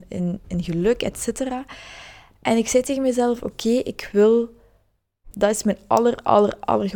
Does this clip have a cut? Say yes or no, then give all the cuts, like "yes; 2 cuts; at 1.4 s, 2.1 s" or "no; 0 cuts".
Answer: yes; 1 cut; at 5.3 s